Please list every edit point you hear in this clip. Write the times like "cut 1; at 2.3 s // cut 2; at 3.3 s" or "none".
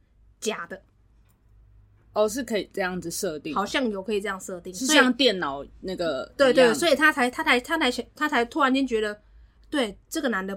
none